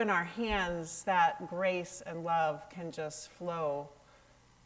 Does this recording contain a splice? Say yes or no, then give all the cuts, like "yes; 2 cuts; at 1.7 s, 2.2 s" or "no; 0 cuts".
no; 0 cuts